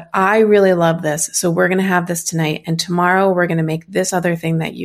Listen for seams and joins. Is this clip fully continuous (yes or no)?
yes